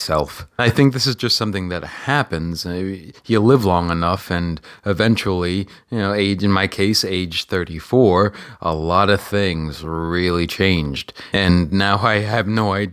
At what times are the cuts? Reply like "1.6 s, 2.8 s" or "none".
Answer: none